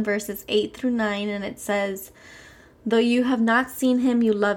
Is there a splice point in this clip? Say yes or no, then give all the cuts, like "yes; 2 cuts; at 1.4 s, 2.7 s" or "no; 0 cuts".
no; 0 cuts